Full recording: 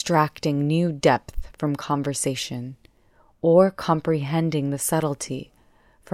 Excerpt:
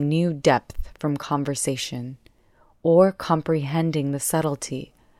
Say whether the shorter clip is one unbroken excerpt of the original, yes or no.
yes